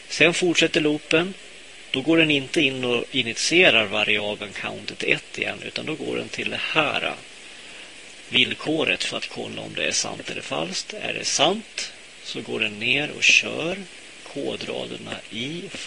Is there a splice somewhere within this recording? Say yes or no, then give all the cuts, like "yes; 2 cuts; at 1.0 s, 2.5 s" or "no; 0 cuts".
no; 0 cuts